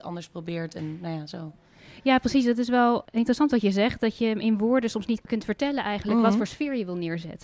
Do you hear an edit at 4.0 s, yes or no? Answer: no